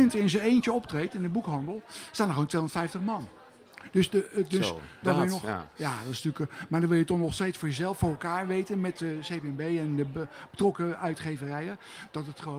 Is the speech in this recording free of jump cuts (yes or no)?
no